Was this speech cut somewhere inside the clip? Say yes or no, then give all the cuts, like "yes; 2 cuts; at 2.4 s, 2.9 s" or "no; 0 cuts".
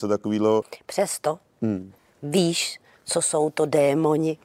no; 0 cuts